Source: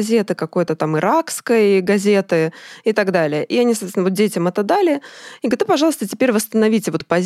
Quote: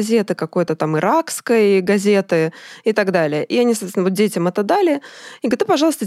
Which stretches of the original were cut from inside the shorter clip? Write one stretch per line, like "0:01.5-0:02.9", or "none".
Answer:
none